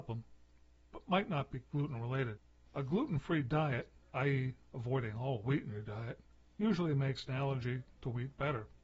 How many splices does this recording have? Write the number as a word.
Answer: one